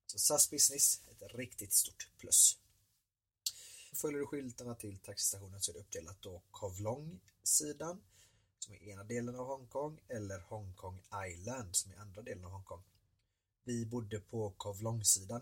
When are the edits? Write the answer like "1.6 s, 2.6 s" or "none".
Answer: 3.9 s